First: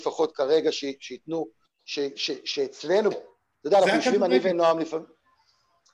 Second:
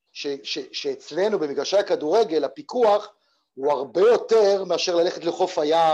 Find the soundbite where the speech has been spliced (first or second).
first